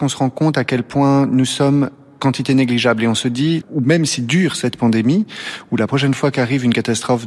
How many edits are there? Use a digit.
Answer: 1